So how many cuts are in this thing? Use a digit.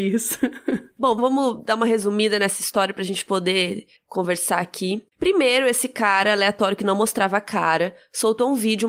1